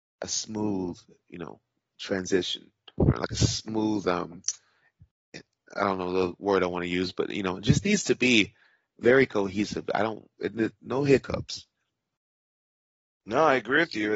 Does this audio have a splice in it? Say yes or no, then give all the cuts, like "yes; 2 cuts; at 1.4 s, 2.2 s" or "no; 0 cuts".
no; 0 cuts